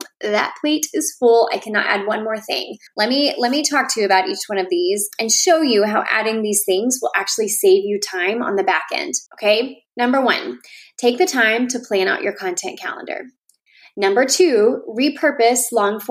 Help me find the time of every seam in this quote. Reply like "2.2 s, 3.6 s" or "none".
2.9 s, 9.3 s